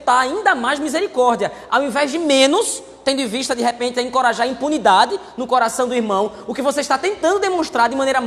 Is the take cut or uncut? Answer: cut